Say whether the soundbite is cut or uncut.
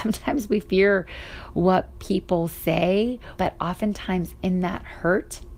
cut